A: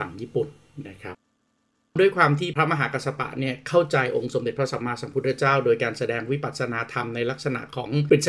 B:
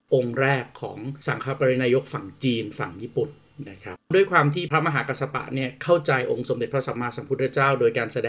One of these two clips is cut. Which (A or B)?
B